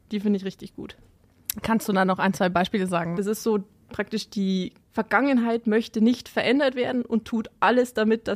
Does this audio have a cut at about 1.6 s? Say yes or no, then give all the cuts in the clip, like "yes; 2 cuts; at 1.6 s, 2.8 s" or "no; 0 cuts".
no; 2 cuts; at 3.1 s, 4.8 s